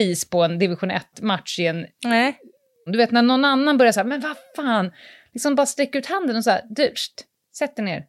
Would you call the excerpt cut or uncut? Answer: cut